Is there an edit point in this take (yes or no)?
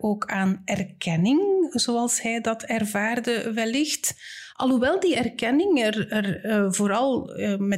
no